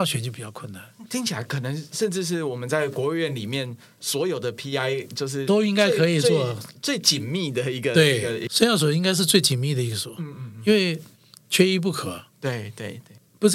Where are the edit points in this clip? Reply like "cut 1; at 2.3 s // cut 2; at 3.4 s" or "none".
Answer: none